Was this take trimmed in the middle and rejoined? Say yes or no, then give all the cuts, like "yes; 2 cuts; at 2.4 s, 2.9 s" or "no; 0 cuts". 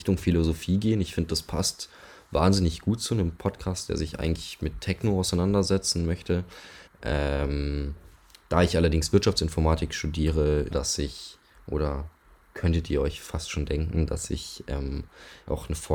yes; 2 cuts; at 6.9 s, 10.7 s